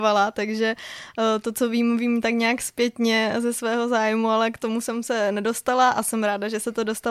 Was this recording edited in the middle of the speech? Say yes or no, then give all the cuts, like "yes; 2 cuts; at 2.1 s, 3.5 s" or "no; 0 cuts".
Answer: no; 0 cuts